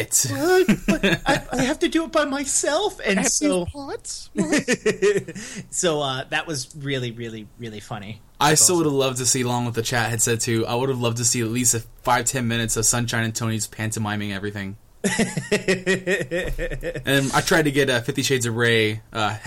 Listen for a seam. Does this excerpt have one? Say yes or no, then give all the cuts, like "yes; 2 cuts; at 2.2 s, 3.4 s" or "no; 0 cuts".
no; 0 cuts